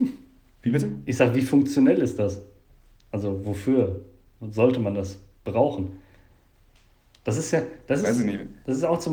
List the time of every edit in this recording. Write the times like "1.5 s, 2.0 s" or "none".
none